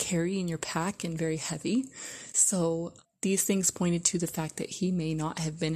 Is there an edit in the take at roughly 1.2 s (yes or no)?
no